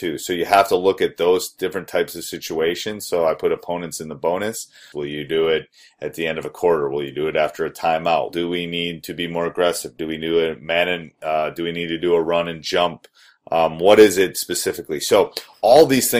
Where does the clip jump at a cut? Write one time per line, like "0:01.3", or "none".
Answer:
0:04.9
0:08.3